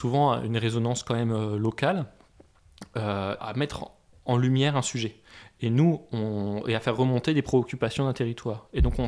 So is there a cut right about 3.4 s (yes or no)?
yes